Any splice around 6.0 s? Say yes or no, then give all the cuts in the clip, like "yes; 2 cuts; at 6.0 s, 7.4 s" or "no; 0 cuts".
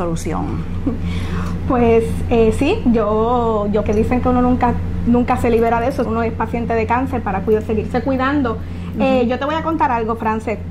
yes; 2 cuts; at 3.8 s, 6.0 s